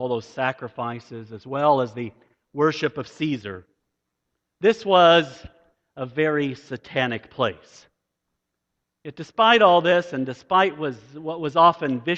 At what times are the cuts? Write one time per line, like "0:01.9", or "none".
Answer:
none